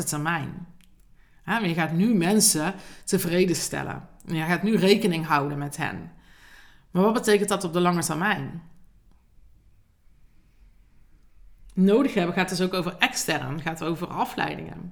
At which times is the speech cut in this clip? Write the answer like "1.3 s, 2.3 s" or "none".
none